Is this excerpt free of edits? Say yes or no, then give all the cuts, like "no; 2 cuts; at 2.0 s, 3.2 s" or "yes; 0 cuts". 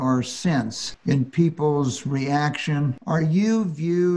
yes; 0 cuts